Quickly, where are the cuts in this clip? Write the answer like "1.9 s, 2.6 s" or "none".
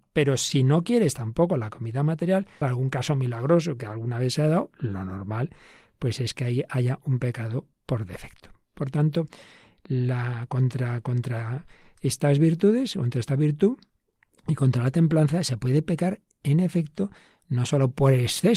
2.6 s